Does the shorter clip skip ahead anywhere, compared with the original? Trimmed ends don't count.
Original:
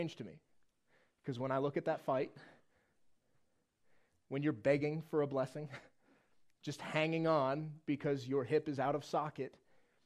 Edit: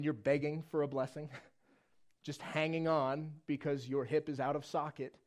no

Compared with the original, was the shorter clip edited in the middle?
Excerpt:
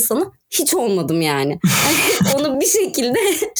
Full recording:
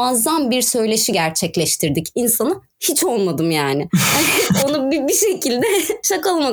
yes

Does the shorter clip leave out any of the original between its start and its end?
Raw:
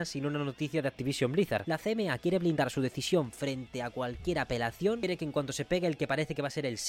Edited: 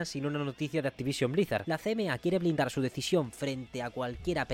no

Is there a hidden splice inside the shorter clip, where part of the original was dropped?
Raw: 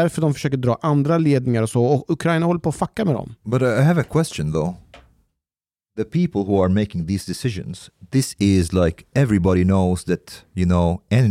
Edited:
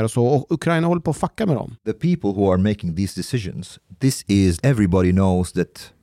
yes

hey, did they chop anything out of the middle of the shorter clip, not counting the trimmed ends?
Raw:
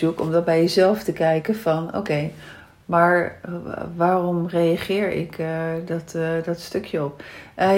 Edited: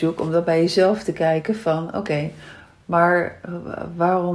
no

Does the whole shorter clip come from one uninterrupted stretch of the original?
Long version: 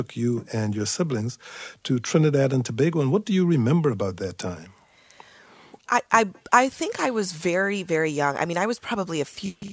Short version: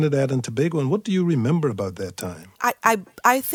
no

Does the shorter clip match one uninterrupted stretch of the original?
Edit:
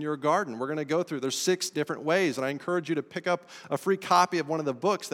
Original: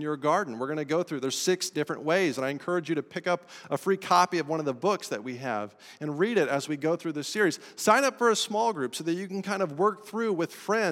yes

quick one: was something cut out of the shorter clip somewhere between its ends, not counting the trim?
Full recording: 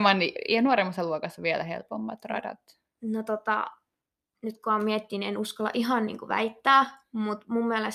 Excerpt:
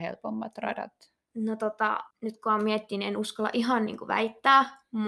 yes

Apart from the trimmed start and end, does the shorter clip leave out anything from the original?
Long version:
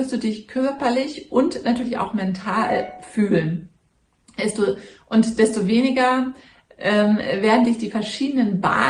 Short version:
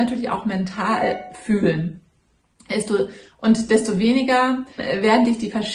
yes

